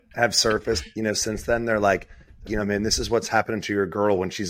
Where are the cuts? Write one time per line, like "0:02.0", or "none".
0:02.5

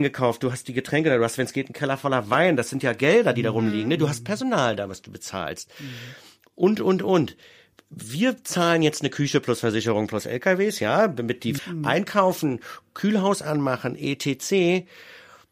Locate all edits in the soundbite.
0:11.6

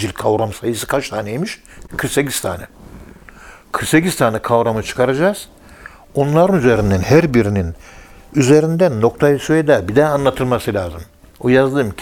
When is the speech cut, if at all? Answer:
none

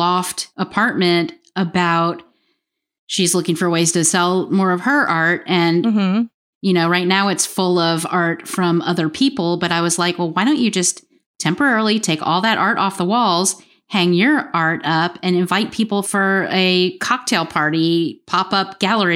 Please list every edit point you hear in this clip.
0:06.5

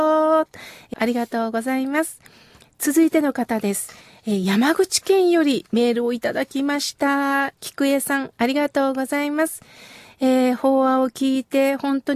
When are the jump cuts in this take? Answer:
0:00.9

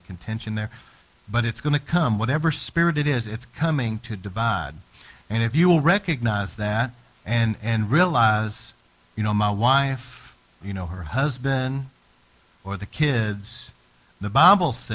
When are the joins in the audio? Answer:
0:10.6

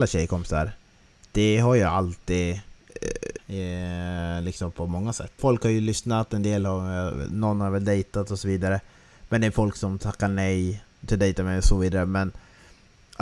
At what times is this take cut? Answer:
0:03.4
0:05.4

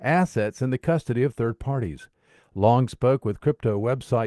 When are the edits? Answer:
none

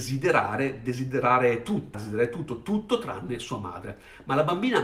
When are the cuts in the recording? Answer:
0:01.9

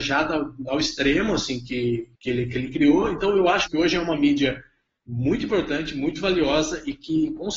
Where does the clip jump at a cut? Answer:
0:02.1
0:03.7

